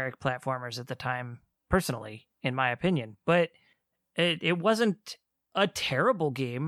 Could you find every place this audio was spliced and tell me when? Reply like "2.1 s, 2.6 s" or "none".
2.3 s